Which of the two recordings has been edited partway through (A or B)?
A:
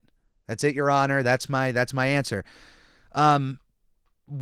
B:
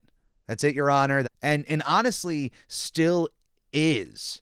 B